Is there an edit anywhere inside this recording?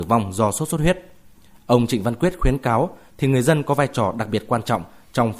yes; 1 cut; at 3.1 s

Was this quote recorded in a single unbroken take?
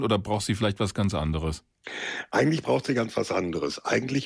yes; 0 cuts

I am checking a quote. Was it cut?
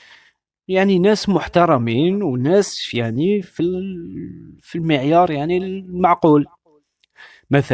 no; 0 cuts

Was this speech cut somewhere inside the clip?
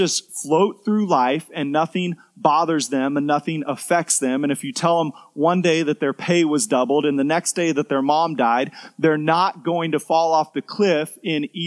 no; 0 cuts

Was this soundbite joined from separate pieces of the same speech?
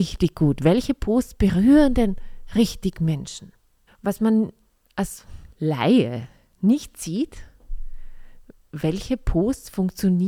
yes; 2 cuts; at 3.9 s, 5.5 s

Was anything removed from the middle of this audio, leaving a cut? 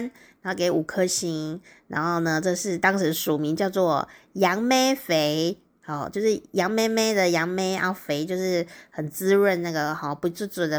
no; 0 cuts

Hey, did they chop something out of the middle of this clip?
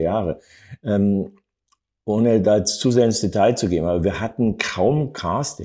no; 0 cuts

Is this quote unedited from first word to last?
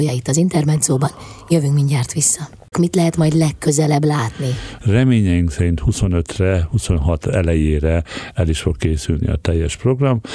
no; 2 cuts; at 2.7 s, 4.8 s

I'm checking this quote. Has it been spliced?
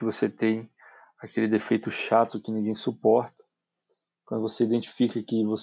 no; 0 cuts

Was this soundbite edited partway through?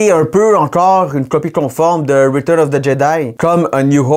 no; 0 cuts

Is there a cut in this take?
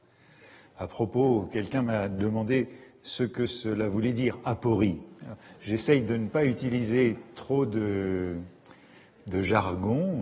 no; 0 cuts

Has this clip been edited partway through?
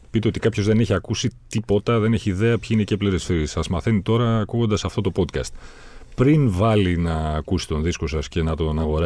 no; 0 cuts

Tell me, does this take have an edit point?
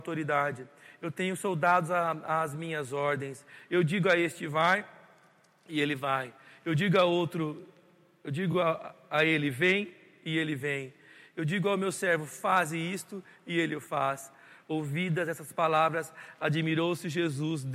no; 0 cuts

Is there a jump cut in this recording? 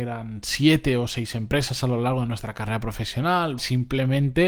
yes; 1 cut; at 3.6 s

